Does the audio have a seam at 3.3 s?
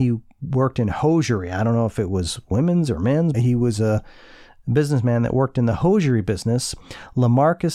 yes; 1 cut; at 3.3 s

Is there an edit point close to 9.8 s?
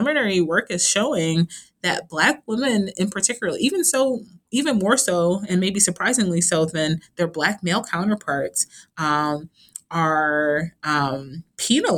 no; 0 cuts

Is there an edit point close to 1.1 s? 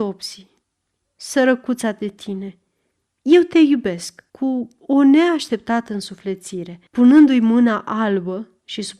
no; 2 cuts; at 4.3 s, 6.9 s

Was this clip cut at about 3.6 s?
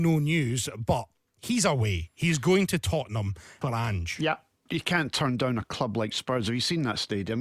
yes; 1 cut; at 3.6 s

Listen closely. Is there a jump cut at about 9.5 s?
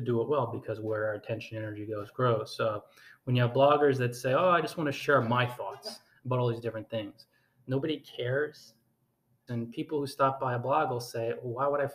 yes; 1 cut; at 9.5 s

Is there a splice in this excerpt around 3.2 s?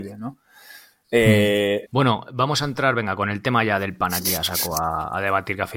no; 1 cut; at 1.9 s

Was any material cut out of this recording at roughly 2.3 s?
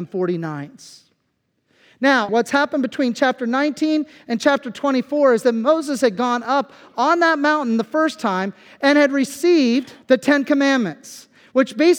yes; 2 cuts; at 2.3 s, 10.0 s

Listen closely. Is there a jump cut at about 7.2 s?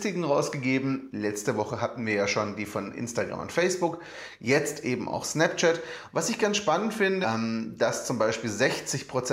yes; 2 cuts; at 6.1 s, 7.2 s

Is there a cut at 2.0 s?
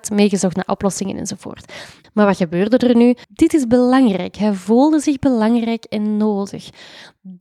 yes; 2 cuts; at 2.0 s, 3.2 s

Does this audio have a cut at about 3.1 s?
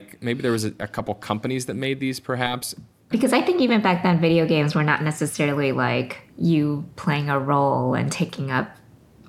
yes; 2 cuts; at 3.1 s, 6.3 s

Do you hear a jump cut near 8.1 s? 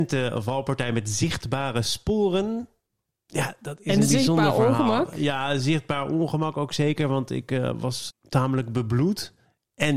yes; 1 cut; at 8.1 s

